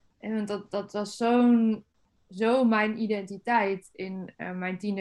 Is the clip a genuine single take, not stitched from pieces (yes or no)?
yes